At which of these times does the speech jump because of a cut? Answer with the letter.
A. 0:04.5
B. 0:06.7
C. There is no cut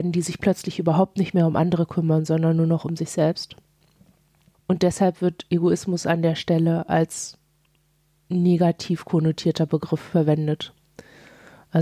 A